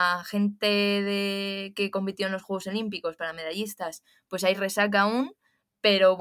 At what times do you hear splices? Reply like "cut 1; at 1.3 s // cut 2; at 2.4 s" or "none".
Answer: none